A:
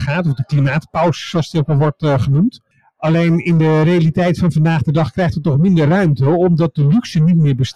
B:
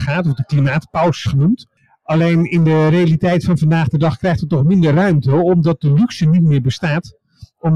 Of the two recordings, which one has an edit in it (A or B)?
B